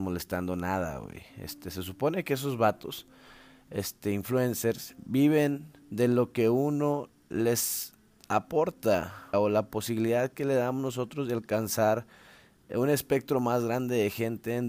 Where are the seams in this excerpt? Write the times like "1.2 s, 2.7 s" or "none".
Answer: 5.8 s, 9.3 s